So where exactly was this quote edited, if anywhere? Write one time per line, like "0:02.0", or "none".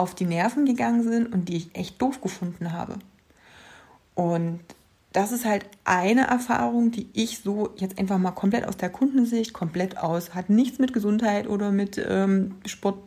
none

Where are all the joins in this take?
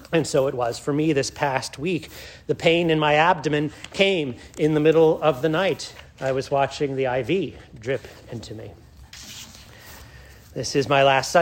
0:06.1

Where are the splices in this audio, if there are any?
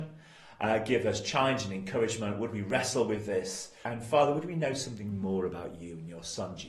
0:03.8

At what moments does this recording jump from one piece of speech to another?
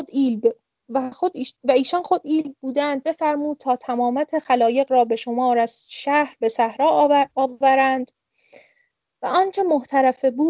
none

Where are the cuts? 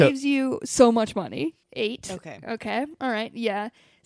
0:01.6

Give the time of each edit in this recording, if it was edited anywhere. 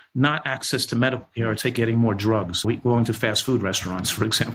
0:02.6

